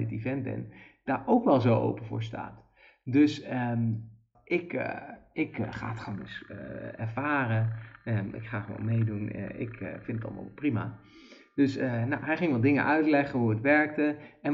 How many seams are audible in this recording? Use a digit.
1